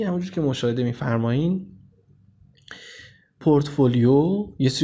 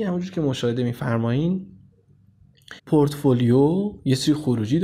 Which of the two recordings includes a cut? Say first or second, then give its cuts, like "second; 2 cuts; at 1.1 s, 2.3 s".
second; 1 cut; at 2.8 s